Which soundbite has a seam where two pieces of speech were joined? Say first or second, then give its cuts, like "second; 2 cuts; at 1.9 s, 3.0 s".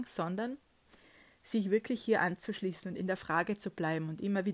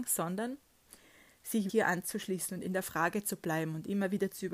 second; 1 cut; at 1.7 s